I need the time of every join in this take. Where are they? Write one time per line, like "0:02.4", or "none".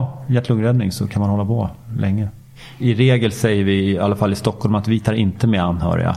none

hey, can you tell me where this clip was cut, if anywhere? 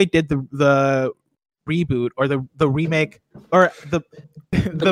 none

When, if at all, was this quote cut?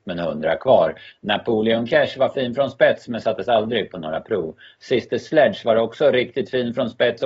0:01.1

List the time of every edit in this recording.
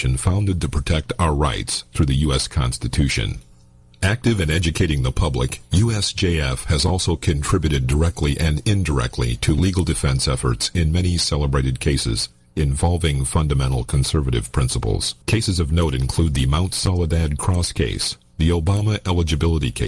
0:15.2
0:18.3

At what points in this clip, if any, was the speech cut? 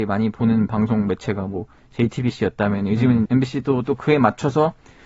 0:03.3

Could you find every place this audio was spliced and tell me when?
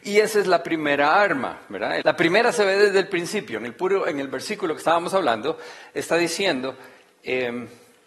0:02.0

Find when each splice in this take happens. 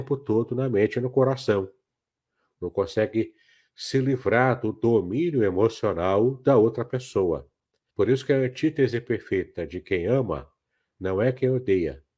0:07.9

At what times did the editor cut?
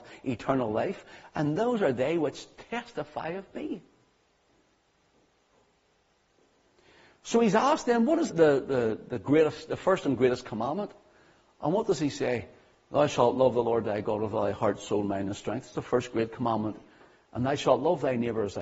0:08.3

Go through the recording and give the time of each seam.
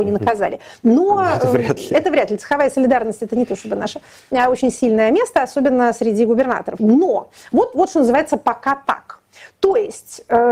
0:06.8

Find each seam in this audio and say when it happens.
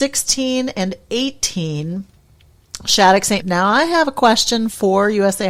0:03.4

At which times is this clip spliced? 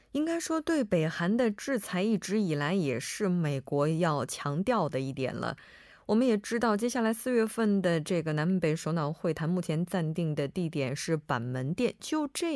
none

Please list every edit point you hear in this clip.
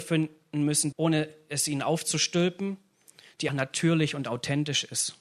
0:00.9
0:03.5

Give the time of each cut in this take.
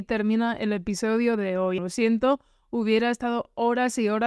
0:01.8

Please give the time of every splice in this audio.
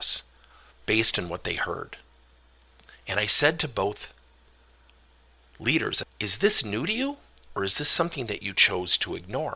0:06.0

